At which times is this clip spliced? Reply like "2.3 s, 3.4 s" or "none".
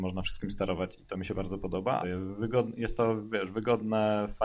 2.0 s

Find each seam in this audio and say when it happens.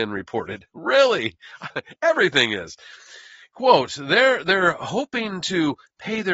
1.7 s

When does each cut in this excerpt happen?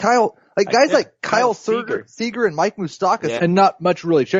3.4 s

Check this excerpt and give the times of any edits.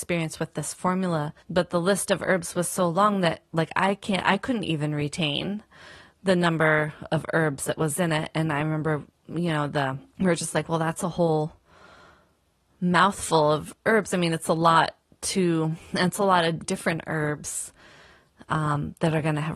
1.4 s, 10.1 s, 16.6 s

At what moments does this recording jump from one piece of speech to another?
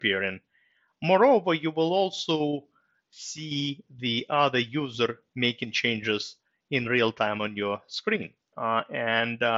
0.9 s, 8.5 s

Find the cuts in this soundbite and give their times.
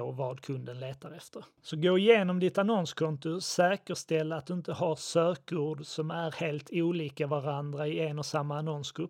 none

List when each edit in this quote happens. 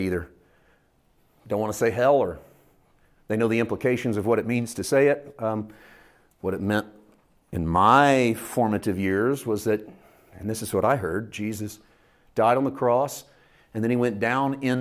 none

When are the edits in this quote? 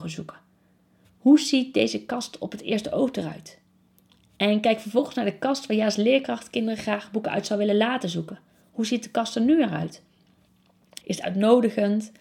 11.0 s

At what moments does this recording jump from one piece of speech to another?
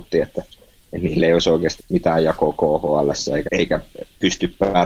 1.8 s, 3.5 s

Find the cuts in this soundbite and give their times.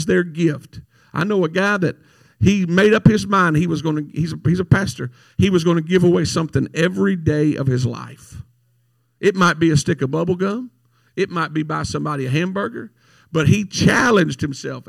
none

